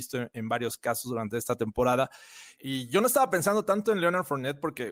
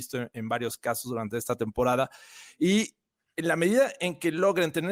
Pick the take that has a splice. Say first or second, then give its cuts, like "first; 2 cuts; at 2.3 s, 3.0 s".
first; 1 cut; at 2.6 s